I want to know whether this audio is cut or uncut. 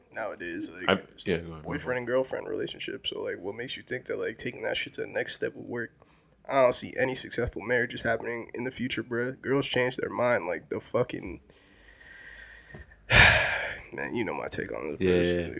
uncut